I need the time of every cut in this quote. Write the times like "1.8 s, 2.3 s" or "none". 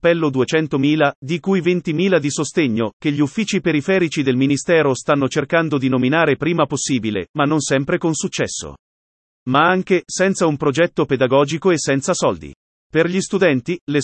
9.2 s

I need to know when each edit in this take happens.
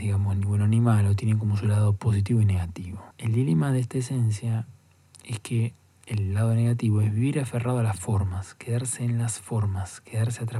3.1 s

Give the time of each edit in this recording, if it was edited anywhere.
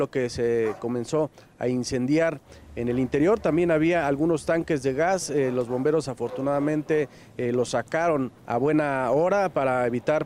8.4 s

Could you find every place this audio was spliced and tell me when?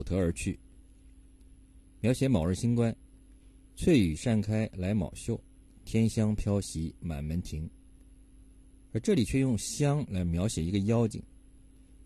none

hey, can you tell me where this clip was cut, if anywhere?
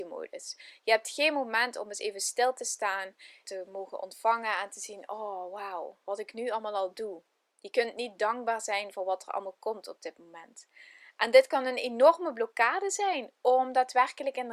3.4 s

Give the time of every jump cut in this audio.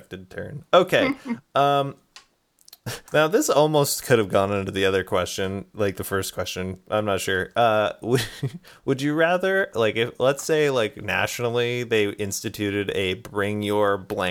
3.1 s

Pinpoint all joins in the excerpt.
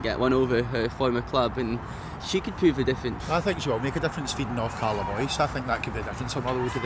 2.2 s, 3.2 s

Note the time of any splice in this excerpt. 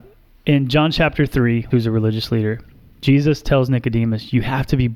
1.7 s

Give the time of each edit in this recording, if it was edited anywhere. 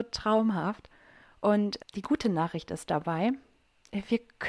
1.8 s

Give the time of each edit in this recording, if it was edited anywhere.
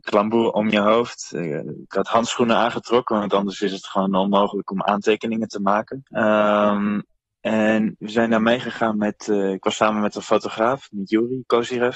6.1 s

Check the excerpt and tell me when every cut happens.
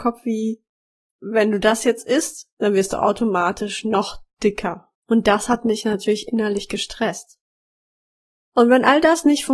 none

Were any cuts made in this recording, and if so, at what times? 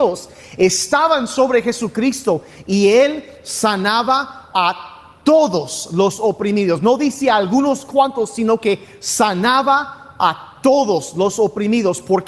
none

